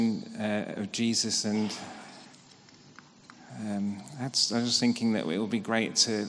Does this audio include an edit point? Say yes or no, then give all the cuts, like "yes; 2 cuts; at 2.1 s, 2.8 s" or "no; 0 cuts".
no; 0 cuts